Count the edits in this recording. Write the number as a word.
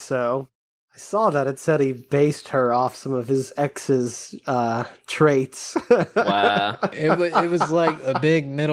zero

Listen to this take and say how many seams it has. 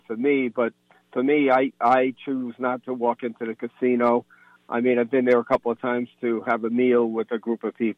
zero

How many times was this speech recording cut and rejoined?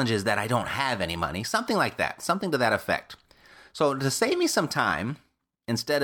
zero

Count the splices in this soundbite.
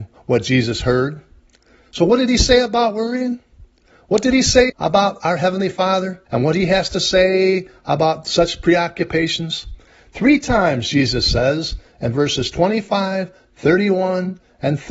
two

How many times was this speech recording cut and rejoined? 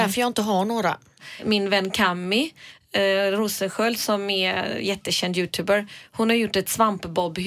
zero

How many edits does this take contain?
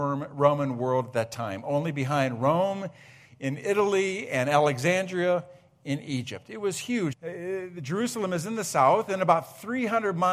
one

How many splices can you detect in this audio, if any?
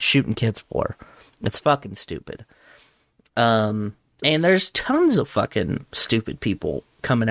zero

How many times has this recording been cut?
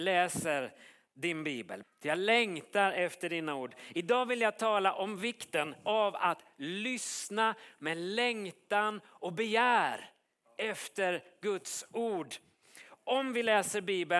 one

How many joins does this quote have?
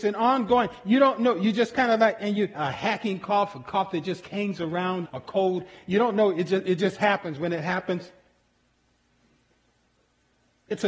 two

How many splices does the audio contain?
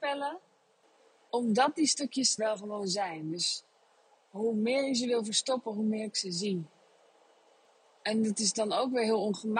one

